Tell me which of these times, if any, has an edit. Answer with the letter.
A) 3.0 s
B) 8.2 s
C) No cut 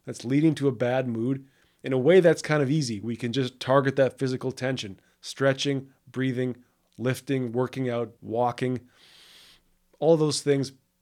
B